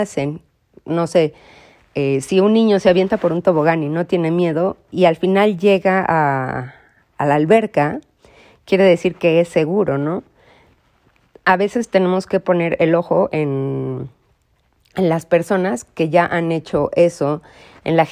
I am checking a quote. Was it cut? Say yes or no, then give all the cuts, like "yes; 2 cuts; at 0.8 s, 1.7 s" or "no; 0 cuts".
no; 0 cuts